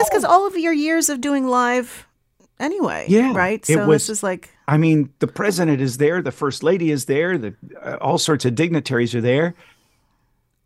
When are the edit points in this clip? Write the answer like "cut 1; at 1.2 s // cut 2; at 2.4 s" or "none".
none